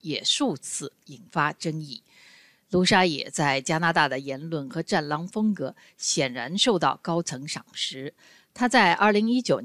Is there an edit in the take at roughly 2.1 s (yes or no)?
no